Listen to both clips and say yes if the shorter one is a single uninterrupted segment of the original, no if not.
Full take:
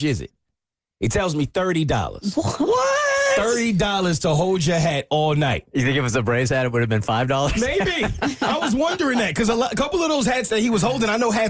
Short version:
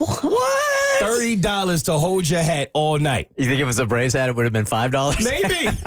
yes